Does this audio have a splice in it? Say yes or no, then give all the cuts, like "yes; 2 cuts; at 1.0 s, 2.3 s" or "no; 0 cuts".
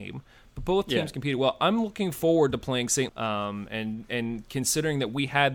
yes; 1 cut; at 3.1 s